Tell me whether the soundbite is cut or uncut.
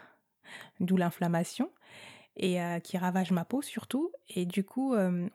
uncut